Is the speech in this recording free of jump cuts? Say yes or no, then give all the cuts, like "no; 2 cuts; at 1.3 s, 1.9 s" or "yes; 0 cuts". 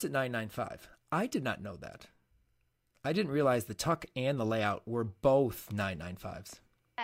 yes; 0 cuts